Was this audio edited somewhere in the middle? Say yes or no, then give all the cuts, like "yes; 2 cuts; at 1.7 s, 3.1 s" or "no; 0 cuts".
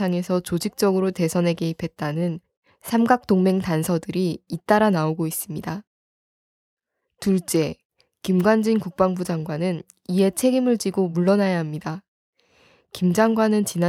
no; 0 cuts